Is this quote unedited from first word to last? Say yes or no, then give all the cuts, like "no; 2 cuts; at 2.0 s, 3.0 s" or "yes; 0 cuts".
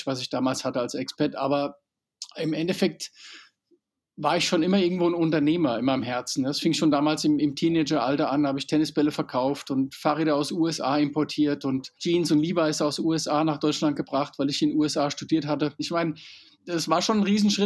no; 2 cuts; at 12.0 s, 15.8 s